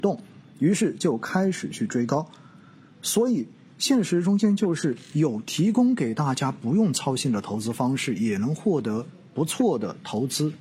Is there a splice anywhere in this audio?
no; 0 cuts

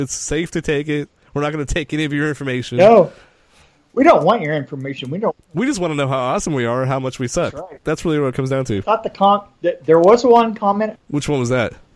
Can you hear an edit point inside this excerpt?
yes; 1 cut; at 10.9 s

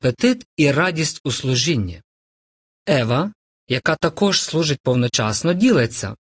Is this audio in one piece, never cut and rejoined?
no; 1 cut; at 2.8 s

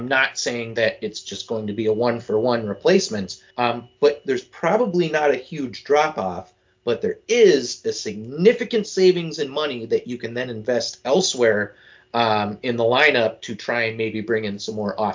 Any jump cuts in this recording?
yes; 1 cut; at 3.5 s

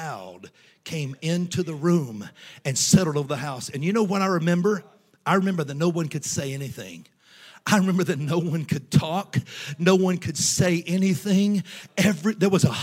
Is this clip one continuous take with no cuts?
yes; 0 cuts

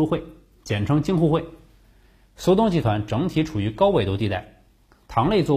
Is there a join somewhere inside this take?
no; 0 cuts

